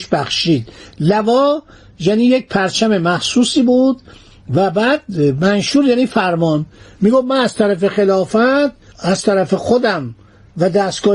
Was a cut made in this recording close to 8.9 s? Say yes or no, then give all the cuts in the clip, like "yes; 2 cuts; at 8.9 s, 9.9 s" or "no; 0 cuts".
yes; 1 cut; at 8.9 s